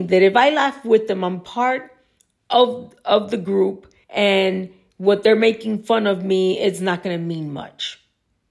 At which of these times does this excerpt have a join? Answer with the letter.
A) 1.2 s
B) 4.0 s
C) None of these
B